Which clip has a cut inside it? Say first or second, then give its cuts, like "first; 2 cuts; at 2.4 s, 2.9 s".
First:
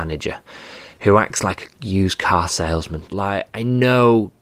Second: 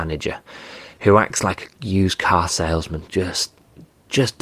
first; 1 cut; at 3.1 s